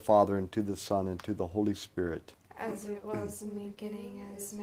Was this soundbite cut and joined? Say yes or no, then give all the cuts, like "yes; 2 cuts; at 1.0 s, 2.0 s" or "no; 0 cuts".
no; 0 cuts